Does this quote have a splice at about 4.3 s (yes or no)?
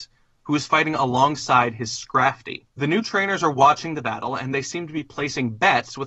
no